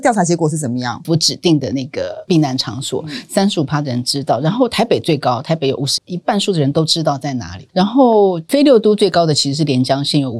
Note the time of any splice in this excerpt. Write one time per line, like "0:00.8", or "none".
0:01.0
0:06.0